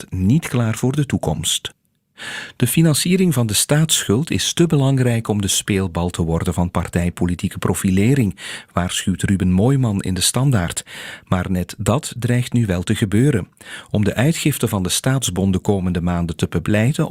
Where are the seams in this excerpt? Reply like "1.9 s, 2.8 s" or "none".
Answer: none

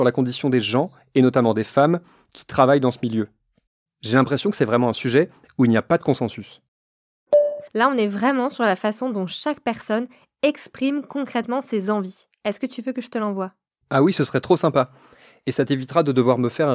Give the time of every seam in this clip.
7.7 s

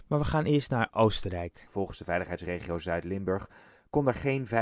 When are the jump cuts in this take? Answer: 1.7 s

